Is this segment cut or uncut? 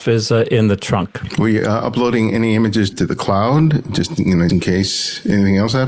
cut